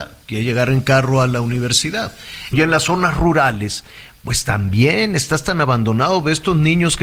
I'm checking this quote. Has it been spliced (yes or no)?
yes